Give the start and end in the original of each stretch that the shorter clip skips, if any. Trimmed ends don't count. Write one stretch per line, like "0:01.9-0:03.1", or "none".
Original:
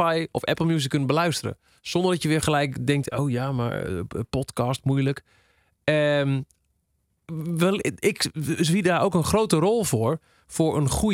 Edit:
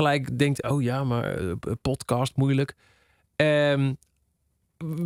none

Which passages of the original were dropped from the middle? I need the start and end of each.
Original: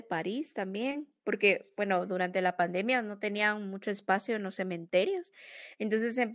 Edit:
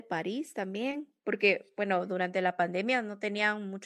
none

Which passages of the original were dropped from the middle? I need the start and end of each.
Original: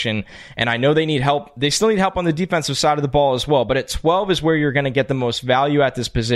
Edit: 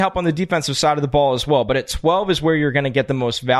none

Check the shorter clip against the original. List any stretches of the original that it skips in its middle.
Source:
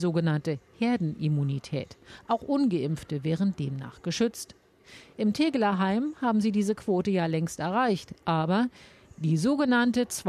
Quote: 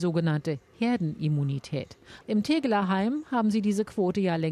0:02.2-0:05.1

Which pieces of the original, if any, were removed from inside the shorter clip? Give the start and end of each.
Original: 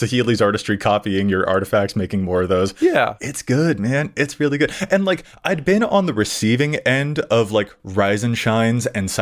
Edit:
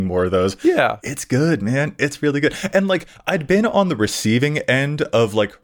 none

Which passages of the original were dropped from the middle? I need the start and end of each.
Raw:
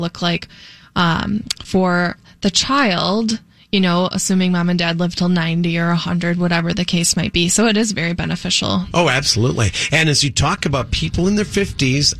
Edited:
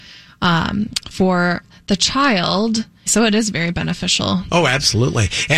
0:03.6-0:07.5

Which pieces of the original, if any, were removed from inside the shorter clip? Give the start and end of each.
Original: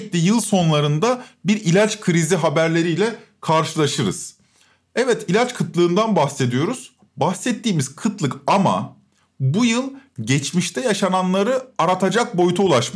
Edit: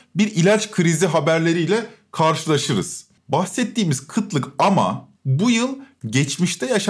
0:04.5-0:07.1
0:09.0-0:09.3

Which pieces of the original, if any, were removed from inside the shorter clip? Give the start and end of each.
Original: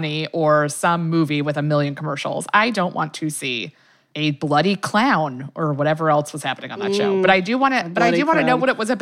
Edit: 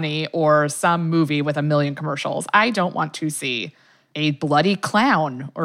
none

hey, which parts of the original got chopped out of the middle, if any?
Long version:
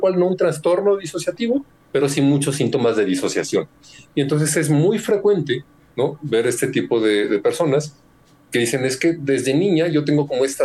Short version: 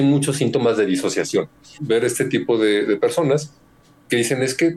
0:04.0-0:06.2

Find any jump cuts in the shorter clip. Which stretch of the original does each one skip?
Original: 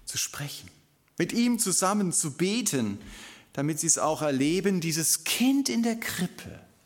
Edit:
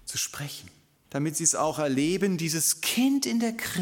0:01.0-0:03.5

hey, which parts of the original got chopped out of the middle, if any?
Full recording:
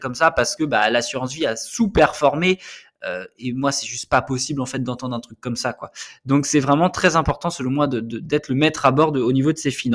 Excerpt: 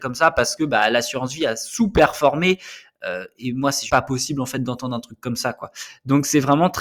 0:03.9-0:04.1

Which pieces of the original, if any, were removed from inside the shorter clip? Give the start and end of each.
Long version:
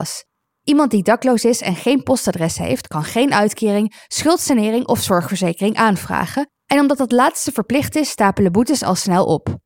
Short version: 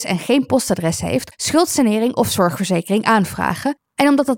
0:02.9-0:04.0

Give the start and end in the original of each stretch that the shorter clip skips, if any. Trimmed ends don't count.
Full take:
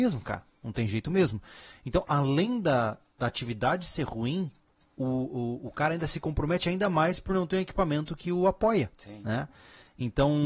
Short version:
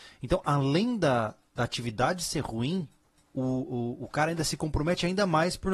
none

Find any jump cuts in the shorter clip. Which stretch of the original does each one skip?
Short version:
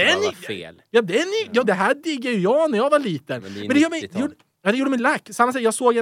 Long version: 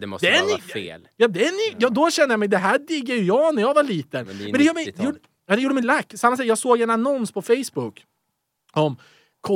0:01.9-0:02.5

